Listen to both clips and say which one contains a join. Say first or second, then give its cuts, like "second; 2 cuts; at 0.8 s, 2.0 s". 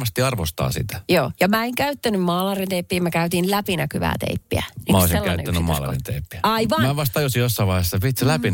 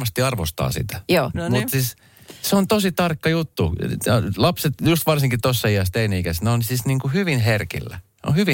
second; 1 cut; at 1.3 s